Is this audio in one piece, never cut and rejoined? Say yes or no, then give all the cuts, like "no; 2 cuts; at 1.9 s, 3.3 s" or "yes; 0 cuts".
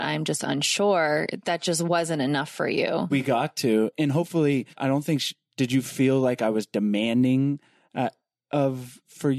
no; 2 cuts; at 3.1 s, 4.8 s